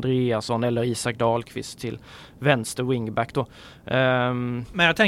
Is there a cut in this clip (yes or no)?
no